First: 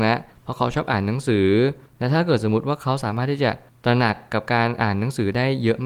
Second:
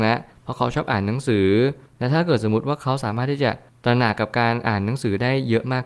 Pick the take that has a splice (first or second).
second